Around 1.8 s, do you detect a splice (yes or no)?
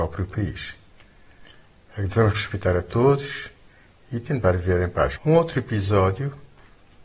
no